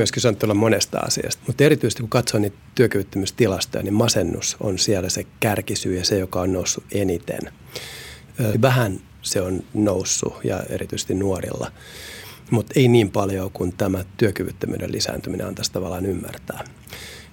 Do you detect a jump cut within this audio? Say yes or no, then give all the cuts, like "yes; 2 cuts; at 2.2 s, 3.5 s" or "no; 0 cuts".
yes; 2 cuts; at 1.4 s, 8.5 s